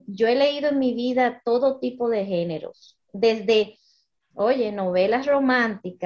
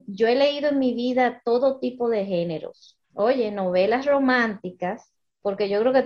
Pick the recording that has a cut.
second; 1 cut; at 3.0 s

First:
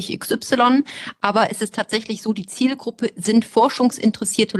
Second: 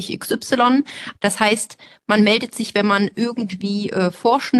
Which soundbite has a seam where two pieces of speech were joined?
second; 1 cut; at 1.1 s

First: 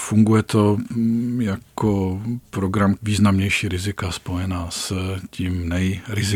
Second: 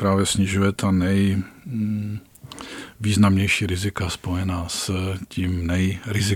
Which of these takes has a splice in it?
first; 1 cut; at 3.0 s

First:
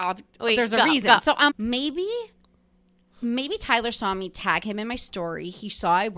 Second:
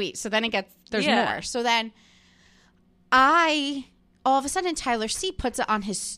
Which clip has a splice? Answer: first; 1 cut; at 1.5 s

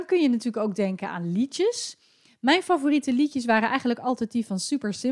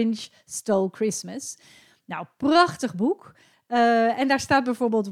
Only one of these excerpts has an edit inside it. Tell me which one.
second; 1 cut; at 3.5 s

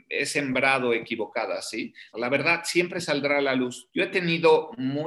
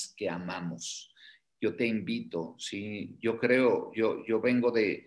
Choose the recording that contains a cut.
first; 2 cuts; at 2.1 s, 3.9 s

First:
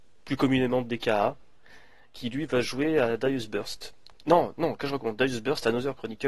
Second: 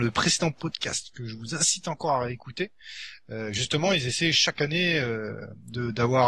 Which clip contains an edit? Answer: first; 1 cut; at 4.2 s

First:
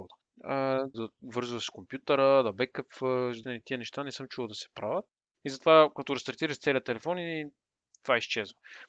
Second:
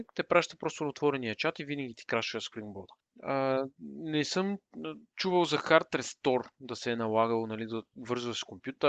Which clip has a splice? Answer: first; 3 cuts; at 0.9 s, 3.4 s, 5.3 s

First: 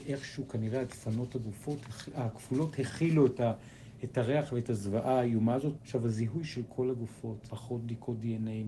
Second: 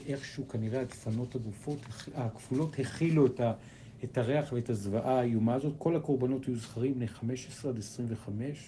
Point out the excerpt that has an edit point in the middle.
first; 2 cuts; at 5.8 s, 7.5 s

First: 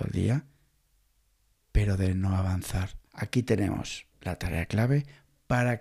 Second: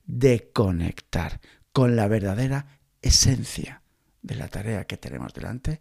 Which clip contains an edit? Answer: first; 2 cuts; at 3.1 s, 4.1 s

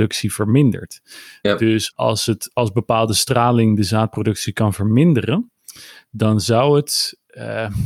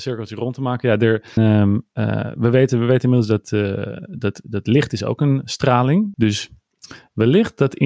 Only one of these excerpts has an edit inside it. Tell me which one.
second; 2 cuts; at 1.4 s, 6.1 s

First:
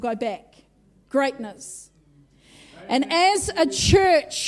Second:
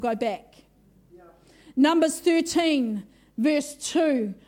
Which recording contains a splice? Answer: first; 1 cut; at 1.0 s

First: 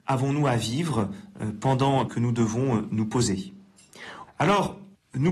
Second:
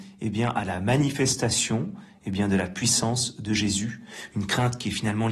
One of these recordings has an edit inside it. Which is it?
first; 2 cuts; at 2.1 s, 4.3 s

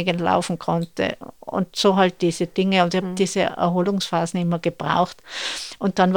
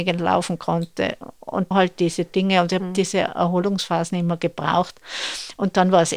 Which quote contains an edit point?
second; 1 cut; at 1.7 s

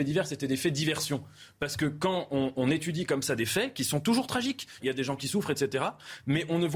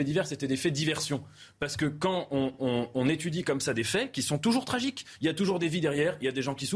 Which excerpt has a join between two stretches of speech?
first; 2 cuts; at 2.5 s, 4.8 s

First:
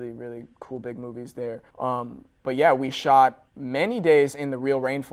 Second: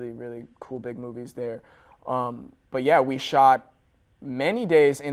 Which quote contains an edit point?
first; 2 cuts; at 1.7 s, 3.5 s

